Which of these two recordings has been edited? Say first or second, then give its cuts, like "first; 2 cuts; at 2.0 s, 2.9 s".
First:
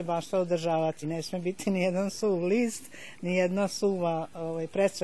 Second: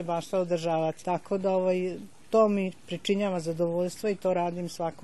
second; 1 cut; at 1.0 s